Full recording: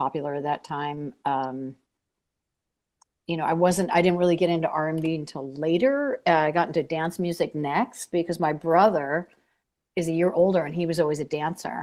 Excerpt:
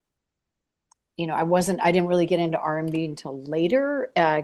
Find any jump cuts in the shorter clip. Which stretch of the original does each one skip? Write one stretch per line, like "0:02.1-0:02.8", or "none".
none